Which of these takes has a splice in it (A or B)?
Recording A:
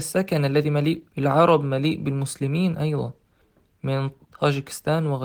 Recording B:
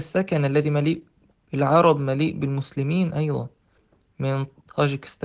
A